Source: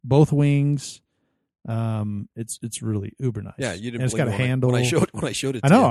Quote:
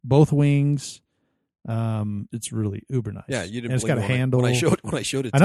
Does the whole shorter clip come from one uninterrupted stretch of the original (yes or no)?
no